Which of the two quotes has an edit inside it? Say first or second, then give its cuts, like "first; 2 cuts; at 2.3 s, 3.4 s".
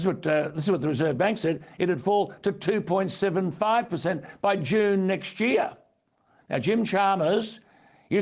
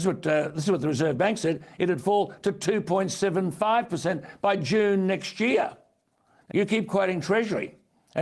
second; 1 cut; at 6.5 s